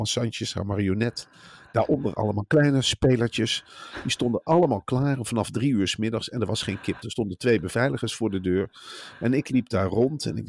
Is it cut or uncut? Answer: uncut